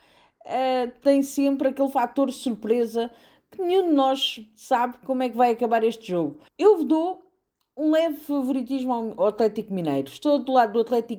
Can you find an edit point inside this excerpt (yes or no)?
yes